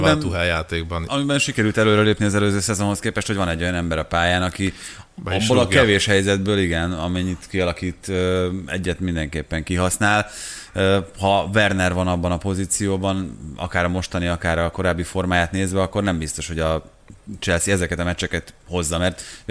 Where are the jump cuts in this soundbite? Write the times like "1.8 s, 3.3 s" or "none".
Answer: none